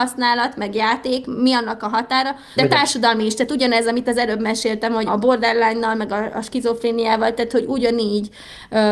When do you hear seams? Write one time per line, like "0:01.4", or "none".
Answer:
0:02.6
0:05.1

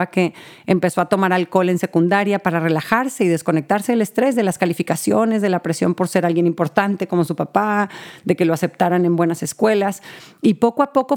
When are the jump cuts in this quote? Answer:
none

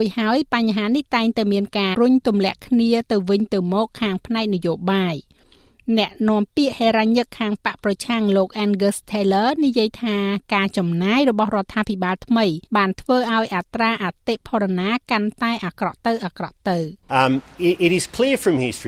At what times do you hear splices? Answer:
0:01.9
0:12.7
0:17.0

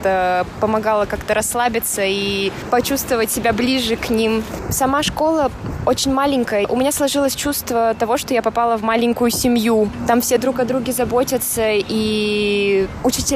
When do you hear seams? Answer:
none

